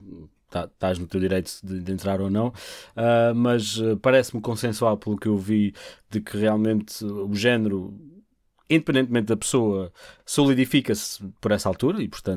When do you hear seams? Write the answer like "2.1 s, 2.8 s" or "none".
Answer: none